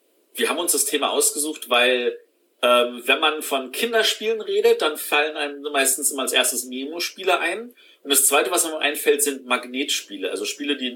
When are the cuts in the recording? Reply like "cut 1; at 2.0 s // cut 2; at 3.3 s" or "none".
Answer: none